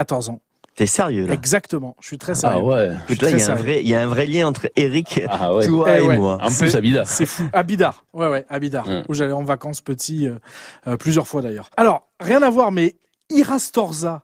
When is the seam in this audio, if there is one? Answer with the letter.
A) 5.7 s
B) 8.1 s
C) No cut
C